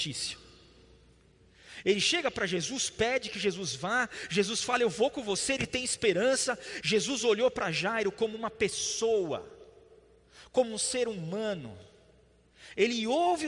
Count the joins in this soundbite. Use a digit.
1